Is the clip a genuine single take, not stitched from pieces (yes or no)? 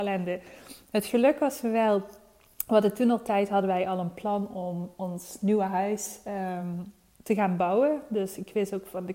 yes